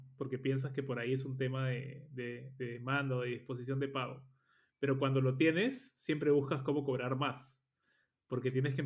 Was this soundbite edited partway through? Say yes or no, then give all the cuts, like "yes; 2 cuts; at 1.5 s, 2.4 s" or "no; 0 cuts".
no; 0 cuts